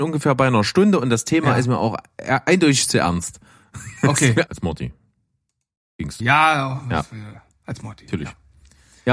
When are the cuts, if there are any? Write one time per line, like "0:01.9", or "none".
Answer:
0:04.5
0:06.2